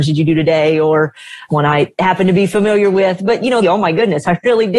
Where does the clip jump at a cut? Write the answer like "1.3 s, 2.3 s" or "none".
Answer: 3.6 s